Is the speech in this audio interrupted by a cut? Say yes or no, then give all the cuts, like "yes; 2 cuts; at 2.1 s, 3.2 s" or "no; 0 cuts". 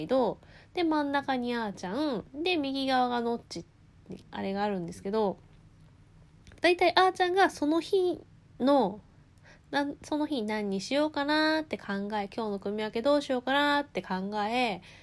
yes; 2 cuts; at 4.2 s, 6.6 s